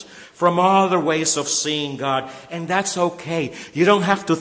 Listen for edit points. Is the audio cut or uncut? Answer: uncut